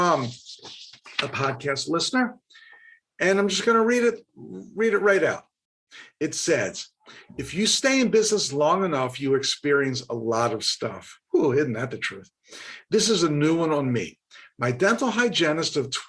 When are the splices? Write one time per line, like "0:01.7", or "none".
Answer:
none